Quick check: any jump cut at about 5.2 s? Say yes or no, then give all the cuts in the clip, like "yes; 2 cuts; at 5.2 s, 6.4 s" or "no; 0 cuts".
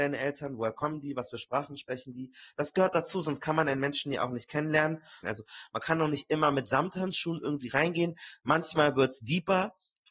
yes; 1 cut; at 5.2 s